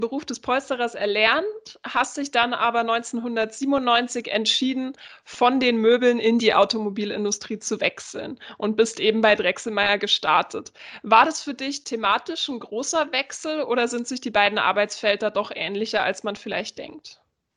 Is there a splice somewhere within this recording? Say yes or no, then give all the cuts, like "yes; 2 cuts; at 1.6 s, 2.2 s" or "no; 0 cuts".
no; 0 cuts